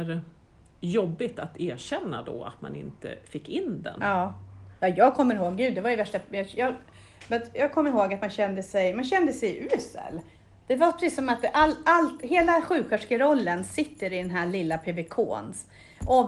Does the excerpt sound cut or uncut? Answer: uncut